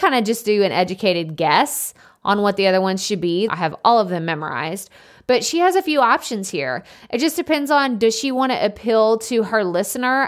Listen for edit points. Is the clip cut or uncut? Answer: cut